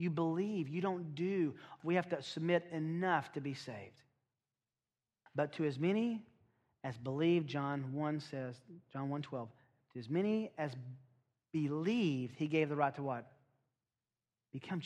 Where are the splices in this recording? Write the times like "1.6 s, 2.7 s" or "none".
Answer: 1.8 s, 5.3 s